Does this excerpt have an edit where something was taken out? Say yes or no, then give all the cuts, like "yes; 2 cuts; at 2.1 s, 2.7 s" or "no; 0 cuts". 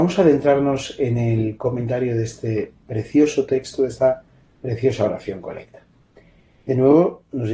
no; 0 cuts